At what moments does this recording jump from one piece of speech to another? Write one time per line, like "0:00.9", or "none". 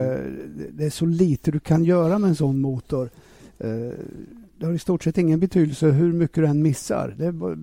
0:04.5